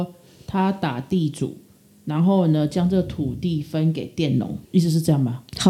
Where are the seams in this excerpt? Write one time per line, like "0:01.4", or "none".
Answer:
0:04.7